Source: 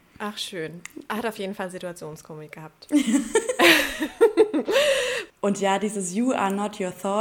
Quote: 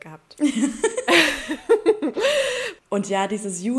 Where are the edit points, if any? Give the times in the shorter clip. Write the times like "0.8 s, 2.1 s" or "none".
none